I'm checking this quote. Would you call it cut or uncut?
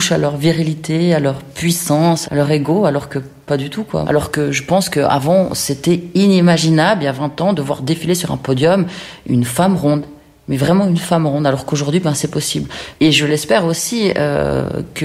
cut